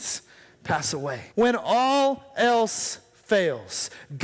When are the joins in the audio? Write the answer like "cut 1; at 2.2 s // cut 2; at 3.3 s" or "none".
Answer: cut 1; at 1.3 s